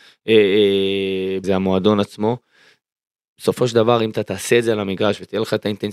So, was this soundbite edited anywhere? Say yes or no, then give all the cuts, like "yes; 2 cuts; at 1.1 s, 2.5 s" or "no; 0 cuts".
yes; 1 cut; at 1.4 s